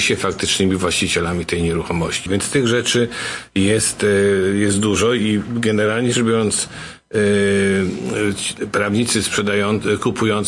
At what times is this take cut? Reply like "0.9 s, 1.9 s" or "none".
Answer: 2.3 s

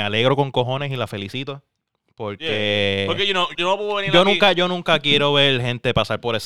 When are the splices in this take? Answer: 3.5 s

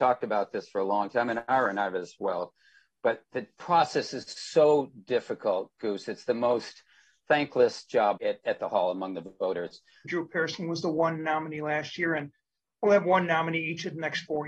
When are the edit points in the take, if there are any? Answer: 8.2 s, 10.0 s

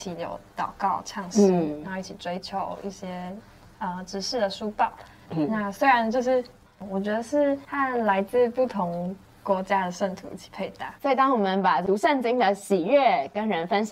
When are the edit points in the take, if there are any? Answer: 6.7 s, 11.0 s

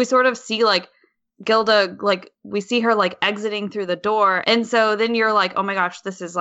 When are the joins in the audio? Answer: 4.4 s

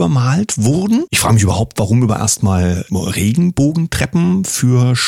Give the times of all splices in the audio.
1.1 s, 2.9 s

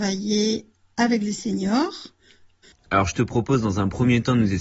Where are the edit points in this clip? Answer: 2.7 s

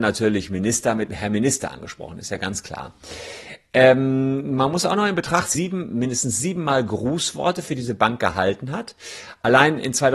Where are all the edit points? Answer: 5.6 s

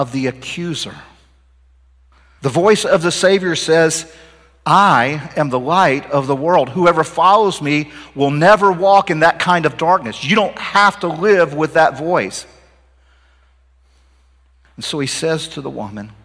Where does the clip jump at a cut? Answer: 2.4 s

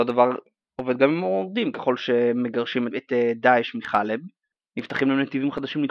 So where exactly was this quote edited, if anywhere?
2.9 s

